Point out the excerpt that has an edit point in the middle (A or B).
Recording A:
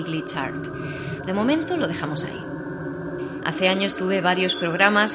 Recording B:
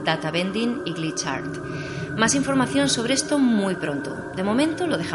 A